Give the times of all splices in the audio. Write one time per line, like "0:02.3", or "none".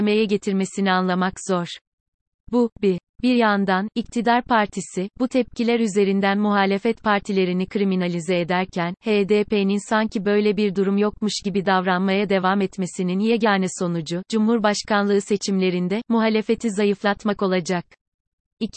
none